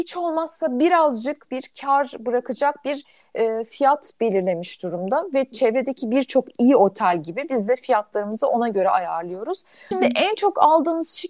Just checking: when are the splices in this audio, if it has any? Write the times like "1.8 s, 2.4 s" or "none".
9.9 s